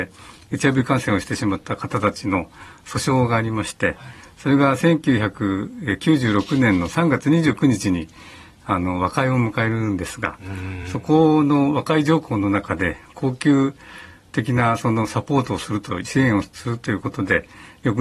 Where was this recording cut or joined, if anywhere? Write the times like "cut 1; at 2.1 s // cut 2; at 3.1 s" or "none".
none